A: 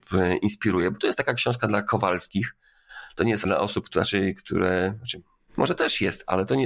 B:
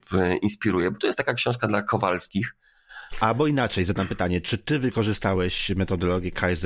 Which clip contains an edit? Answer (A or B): B